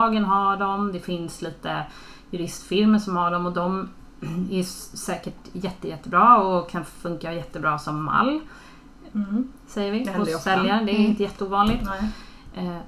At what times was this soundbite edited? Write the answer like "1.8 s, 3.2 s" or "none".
9.1 s